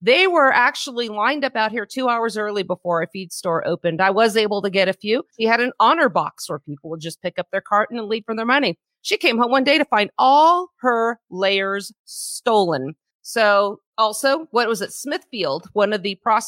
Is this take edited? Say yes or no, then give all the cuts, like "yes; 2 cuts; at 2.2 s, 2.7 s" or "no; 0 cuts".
yes; 2 cuts; at 5.3 s, 13.9 s